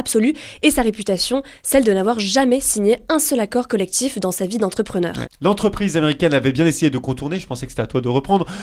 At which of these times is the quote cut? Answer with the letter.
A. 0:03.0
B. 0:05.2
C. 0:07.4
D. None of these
B